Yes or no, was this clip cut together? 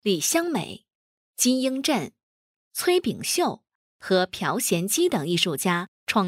no